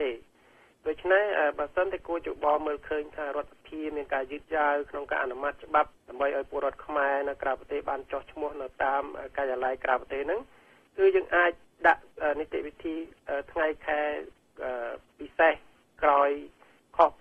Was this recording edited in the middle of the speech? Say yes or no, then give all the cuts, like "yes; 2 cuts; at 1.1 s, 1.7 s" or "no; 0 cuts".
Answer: yes; 1 cut; at 6.0 s